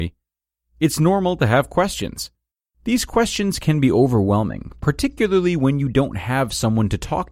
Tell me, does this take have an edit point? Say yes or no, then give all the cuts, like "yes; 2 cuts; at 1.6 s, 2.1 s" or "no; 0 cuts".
yes; 1 cut; at 2.7 s